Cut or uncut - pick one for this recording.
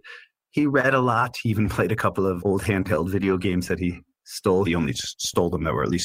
cut